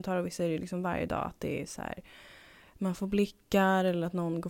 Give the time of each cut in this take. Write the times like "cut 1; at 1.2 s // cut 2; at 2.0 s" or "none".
none